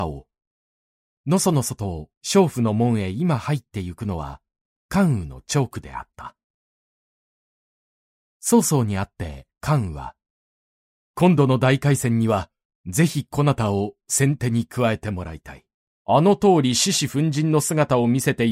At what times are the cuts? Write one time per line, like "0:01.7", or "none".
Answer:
0:01.1
0:11.0
0:16.0